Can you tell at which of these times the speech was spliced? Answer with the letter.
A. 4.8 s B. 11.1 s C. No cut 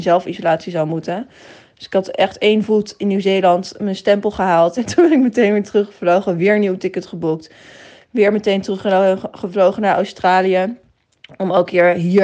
C